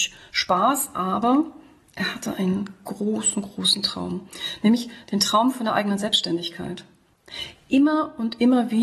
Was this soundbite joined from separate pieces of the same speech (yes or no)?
no